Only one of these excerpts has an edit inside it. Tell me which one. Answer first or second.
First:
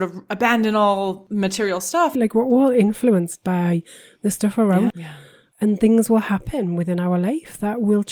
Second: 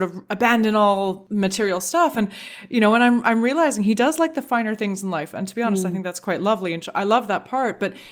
first